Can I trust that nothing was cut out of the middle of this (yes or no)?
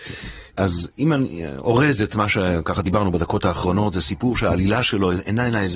yes